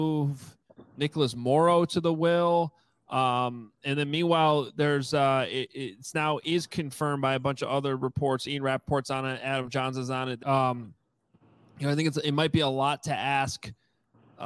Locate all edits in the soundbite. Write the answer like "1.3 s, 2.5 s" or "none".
10.4 s